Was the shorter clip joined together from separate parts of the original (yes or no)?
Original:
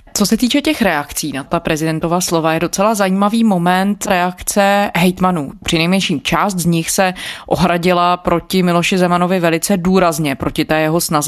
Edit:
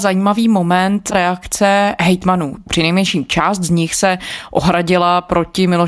no